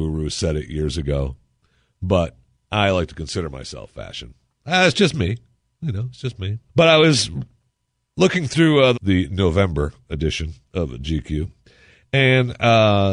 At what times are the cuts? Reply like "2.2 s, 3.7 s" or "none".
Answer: 6.7 s, 8.9 s